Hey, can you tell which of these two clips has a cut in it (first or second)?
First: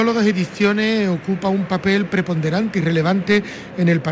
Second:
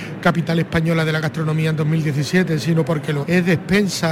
second